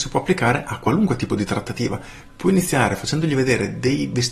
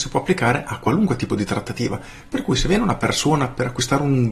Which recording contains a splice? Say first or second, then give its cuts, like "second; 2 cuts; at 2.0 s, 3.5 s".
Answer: first; 1 cut; at 2.3 s